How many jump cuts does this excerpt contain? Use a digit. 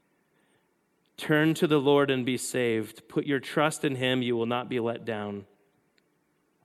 0